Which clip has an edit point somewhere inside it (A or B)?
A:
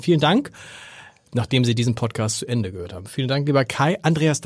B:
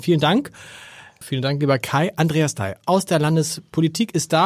B